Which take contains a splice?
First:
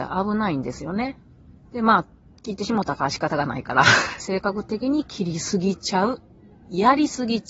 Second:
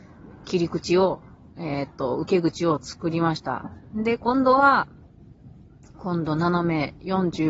first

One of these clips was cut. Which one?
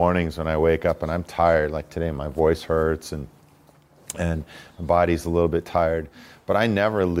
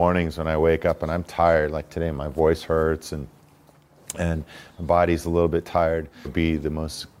second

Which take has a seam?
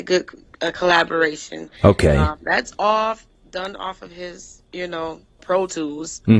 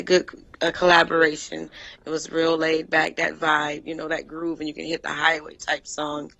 first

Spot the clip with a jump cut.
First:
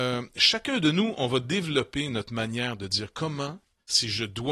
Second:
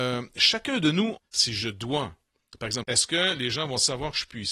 second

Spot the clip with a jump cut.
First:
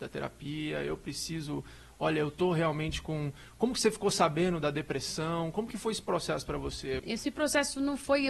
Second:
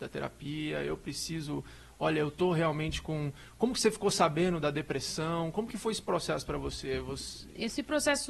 first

